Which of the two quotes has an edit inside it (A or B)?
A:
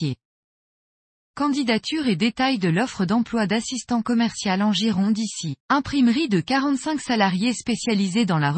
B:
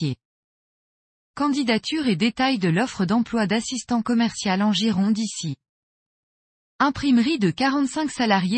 A